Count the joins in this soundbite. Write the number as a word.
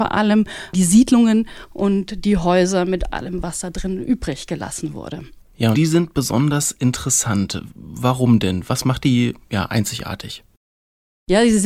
one